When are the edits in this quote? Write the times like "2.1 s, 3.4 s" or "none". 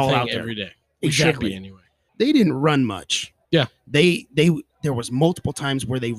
2.1 s, 3.4 s